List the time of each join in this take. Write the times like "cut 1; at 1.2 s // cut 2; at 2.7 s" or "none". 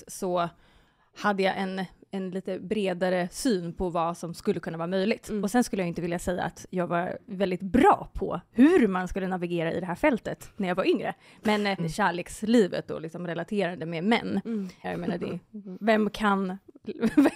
cut 1; at 11.8 s // cut 2; at 14.8 s